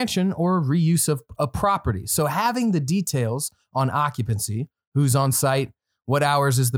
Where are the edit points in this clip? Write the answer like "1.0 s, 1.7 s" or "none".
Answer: none